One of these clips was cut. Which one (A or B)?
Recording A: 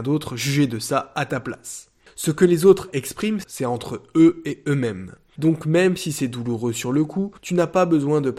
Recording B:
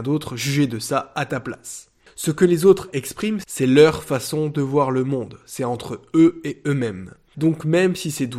A